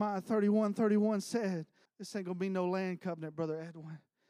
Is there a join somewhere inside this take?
yes; 1 cut; at 1.9 s

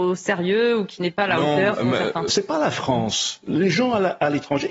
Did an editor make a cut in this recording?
yes; 1 cut; at 2.3 s

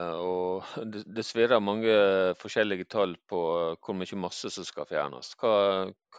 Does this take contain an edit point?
no; 0 cuts

